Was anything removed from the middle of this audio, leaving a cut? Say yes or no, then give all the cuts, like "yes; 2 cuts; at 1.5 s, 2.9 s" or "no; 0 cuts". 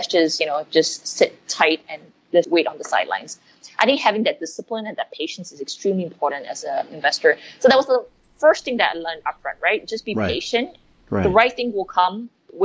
yes; 1 cut; at 2.4 s